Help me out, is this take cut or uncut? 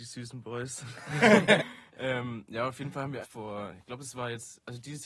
cut